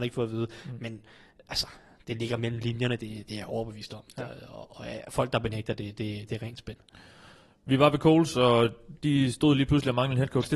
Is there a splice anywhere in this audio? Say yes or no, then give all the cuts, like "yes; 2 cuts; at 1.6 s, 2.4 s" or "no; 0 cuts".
no; 0 cuts